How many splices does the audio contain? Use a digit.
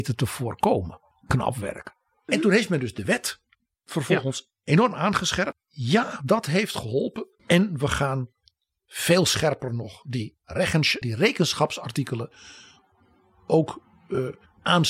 3